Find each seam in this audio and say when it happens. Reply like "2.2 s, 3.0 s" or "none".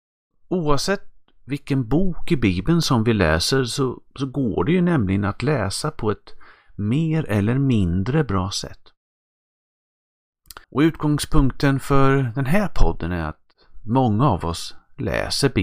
10.6 s